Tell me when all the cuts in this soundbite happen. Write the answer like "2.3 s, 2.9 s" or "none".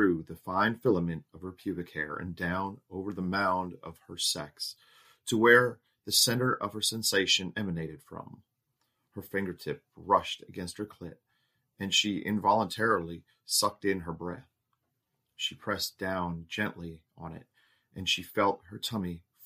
none